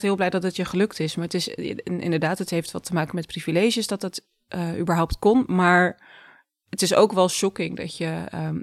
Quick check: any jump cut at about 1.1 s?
no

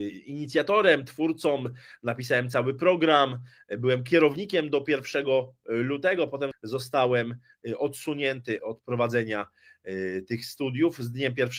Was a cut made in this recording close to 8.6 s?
yes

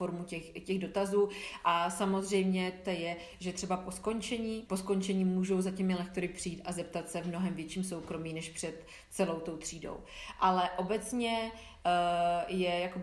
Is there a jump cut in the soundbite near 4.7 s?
yes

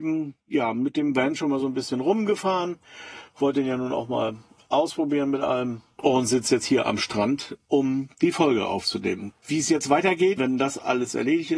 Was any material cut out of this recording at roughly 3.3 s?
no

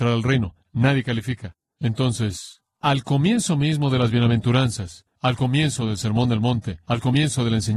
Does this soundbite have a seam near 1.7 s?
no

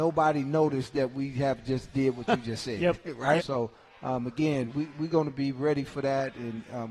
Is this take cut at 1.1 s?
no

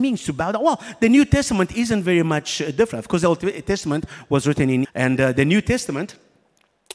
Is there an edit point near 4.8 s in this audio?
yes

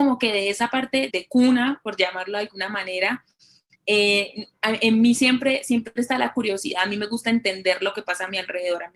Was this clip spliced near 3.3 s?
no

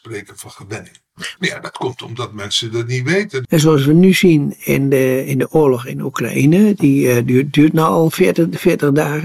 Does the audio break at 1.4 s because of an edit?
yes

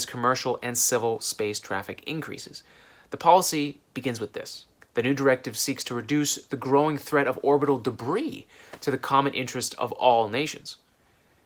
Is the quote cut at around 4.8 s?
yes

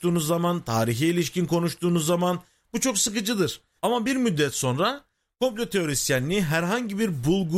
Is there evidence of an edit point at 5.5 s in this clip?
no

